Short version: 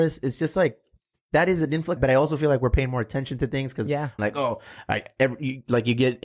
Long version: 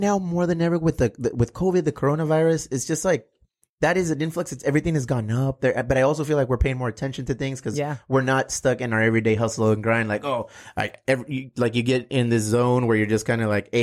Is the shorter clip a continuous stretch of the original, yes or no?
no